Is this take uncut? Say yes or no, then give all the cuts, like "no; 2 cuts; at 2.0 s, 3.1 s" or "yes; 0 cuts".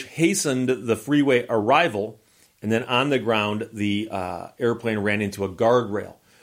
yes; 0 cuts